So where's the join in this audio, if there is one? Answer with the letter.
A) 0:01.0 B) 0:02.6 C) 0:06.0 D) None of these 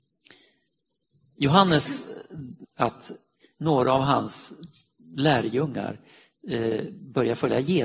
B